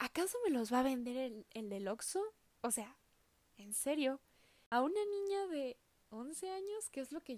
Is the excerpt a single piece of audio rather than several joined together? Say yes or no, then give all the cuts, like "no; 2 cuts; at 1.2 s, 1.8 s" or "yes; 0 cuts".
yes; 0 cuts